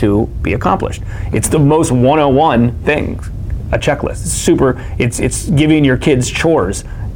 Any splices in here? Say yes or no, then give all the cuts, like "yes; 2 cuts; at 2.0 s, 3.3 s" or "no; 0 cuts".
no; 0 cuts